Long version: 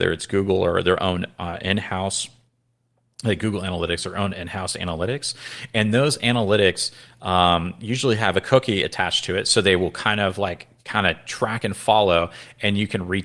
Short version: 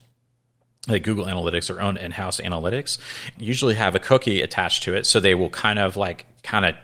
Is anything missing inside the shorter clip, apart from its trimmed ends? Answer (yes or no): yes